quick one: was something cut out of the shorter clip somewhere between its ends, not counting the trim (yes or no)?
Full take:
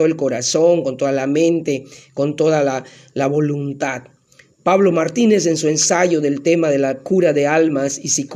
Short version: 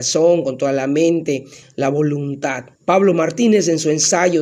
yes